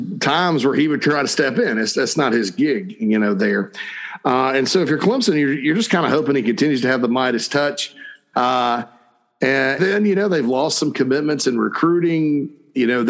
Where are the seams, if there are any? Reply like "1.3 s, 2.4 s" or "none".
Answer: 8.3 s, 9.8 s